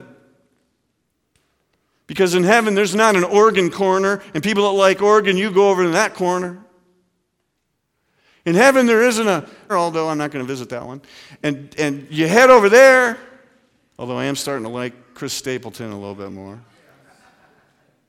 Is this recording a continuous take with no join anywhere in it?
no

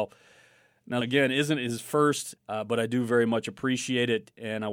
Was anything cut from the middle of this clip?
yes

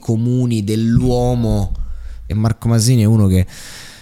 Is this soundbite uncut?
no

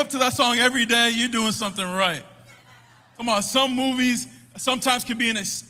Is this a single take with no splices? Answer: yes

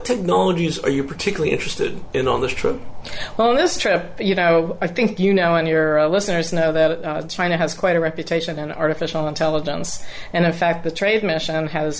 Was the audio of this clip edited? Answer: no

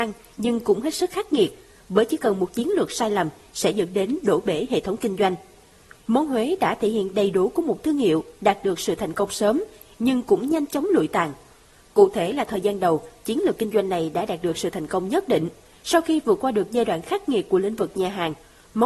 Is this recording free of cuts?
yes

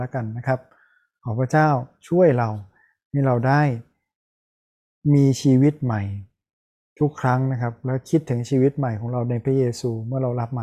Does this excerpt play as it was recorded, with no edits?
yes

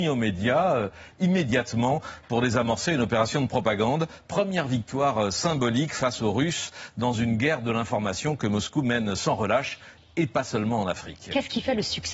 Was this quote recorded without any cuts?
yes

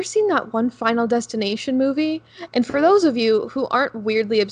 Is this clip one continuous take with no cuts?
no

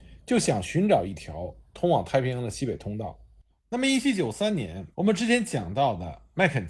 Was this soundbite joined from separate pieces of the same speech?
yes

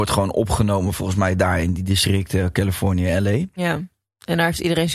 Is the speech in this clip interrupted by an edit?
no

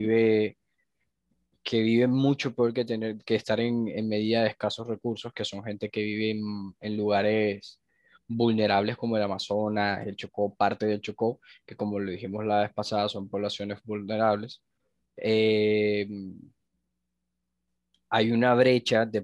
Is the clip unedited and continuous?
yes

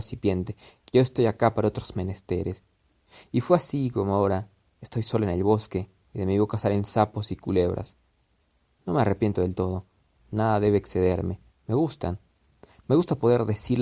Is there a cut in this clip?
yes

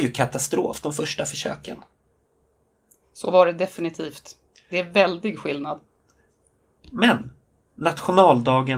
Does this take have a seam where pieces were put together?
no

